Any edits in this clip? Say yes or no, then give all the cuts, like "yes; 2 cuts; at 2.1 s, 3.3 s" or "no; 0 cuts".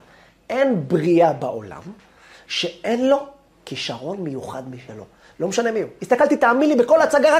yes; 1 cut; at 6.0 s